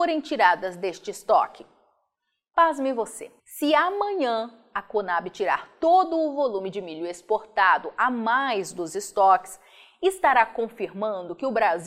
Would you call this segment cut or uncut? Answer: cut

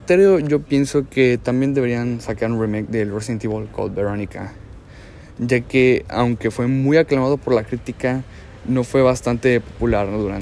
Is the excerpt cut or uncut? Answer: uncut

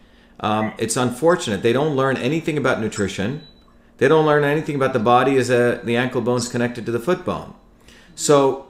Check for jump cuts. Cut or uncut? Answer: uncut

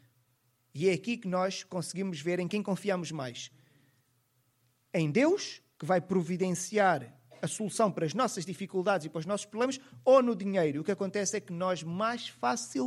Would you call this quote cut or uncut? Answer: uncut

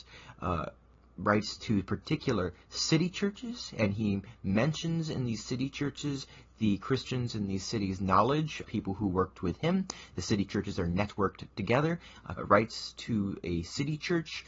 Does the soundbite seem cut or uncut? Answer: cut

